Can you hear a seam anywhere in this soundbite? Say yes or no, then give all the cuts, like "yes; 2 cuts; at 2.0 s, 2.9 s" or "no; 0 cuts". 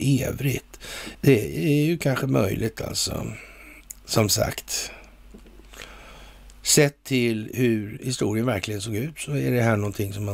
yes; 1 cut; at 1.1 s